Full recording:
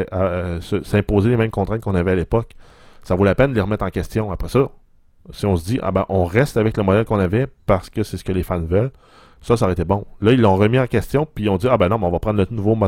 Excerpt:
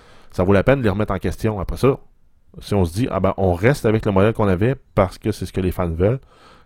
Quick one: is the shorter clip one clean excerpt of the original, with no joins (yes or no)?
yes